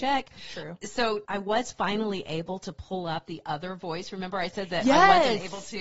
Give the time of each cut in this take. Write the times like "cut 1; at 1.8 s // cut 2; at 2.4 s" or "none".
none